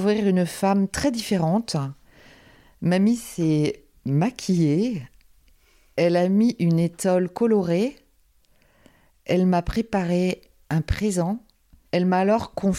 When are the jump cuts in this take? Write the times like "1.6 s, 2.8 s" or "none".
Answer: 11.9 s